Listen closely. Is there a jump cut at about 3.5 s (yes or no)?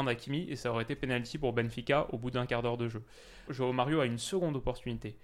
yes